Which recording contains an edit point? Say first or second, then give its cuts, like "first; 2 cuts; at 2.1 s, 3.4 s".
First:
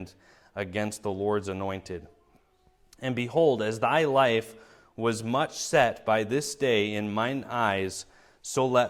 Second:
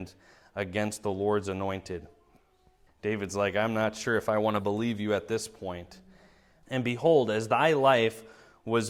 second; 2 cuts; at 2.9 s, 6.6 s